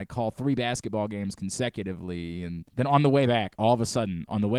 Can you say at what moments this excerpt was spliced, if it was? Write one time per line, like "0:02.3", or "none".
0:02.7